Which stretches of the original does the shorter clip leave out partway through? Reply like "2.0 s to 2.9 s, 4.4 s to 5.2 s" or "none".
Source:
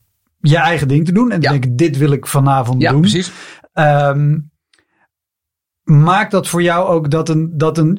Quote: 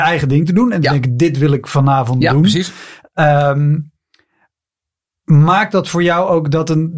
none